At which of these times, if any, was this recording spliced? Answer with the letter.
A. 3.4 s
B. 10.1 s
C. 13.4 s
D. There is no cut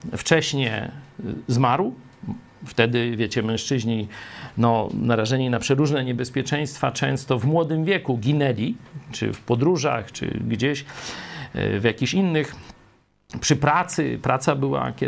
B